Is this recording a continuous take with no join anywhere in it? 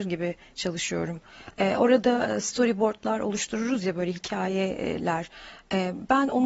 yes; 0 cuts

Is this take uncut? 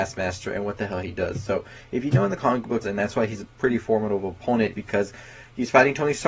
no; 2 cuts; at 2.8 s, 4.7 s

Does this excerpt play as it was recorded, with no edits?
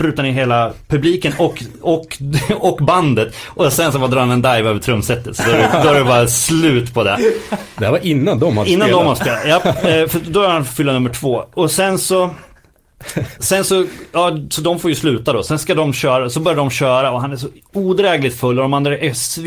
yes; 0 cuts

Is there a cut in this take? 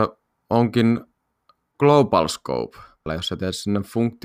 yes; 1 cut; at 3.1 s

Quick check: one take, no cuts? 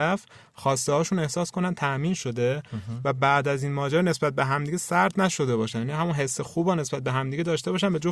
yes; 0 cuts

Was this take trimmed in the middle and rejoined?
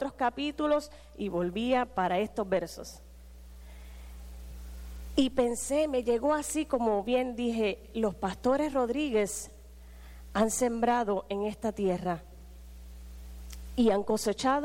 no; 0 cuts

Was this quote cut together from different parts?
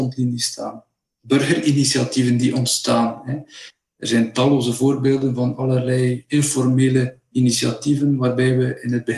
no; 0 cuts

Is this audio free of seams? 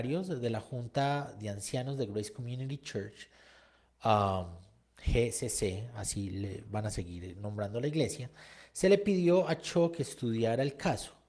yes; 0 cuts

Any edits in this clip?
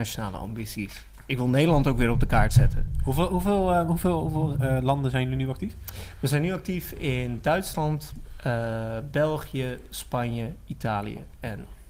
no; 0 cuts

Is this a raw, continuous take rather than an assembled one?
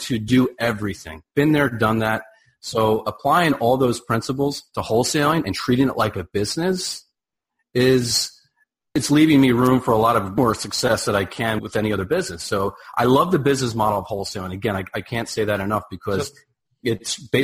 yes; 0 cuts

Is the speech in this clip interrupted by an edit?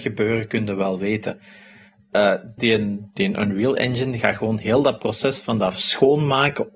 yes; 1 cut; at 2.6 s

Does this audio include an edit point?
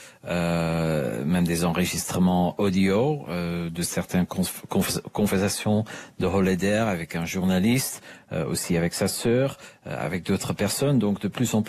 no; 0 cuts

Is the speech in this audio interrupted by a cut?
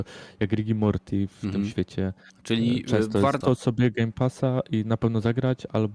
yes; 2 cuts; at 2.3 s, 3.4 s

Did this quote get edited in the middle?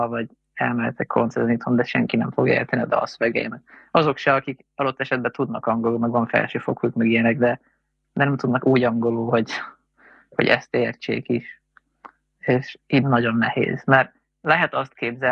no; 0 cuts

